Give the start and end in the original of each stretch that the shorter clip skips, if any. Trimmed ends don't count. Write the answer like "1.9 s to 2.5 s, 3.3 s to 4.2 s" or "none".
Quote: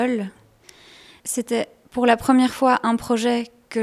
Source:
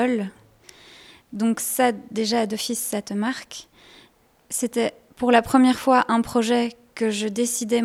1.2 s to 4.5 s